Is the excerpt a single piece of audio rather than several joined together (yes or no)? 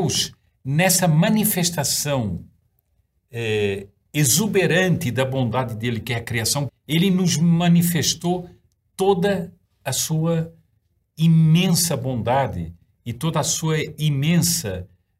no